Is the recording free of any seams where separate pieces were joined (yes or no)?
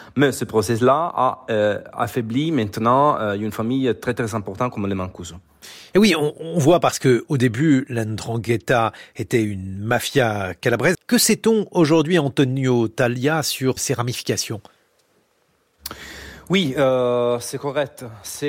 no